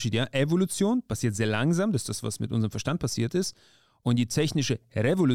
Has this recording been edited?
no; 0 cuts

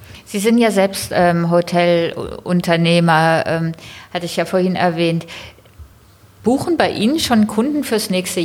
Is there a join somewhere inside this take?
no; 0 cuts

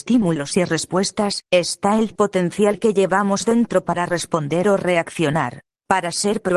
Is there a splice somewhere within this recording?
yes; 1 cut; at 1.4 s

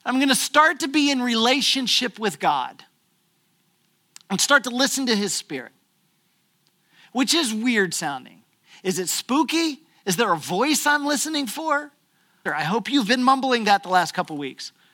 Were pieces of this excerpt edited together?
yes; 1 cut; at 12.5 s

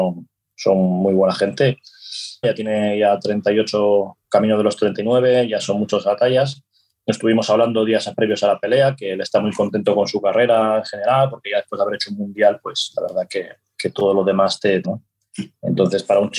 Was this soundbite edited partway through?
yes; 2 cuts; at 2.4 s, 14.8 s

